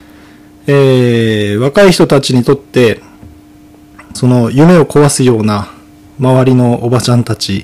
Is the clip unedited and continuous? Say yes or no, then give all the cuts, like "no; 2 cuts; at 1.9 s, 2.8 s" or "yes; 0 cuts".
no; 1 cut; at 4.1 s